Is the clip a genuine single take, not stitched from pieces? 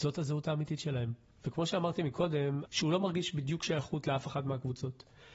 no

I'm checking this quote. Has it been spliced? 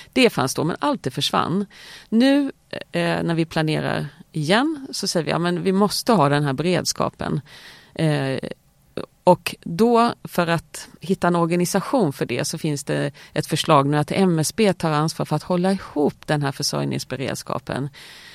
no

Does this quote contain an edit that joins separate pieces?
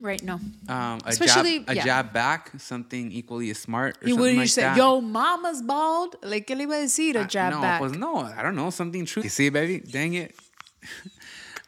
yes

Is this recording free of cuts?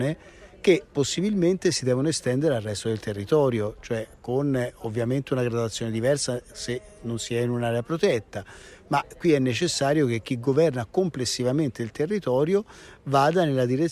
yes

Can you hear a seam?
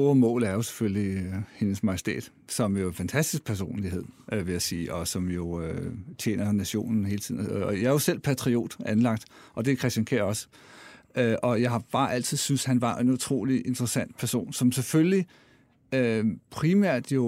no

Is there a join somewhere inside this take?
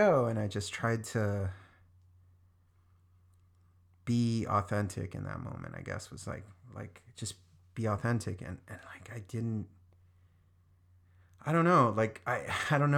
no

